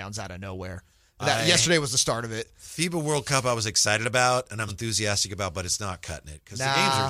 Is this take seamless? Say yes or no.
no